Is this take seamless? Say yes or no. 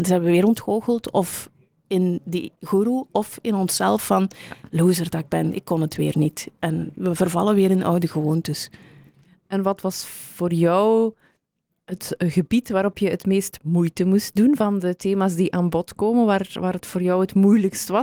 yes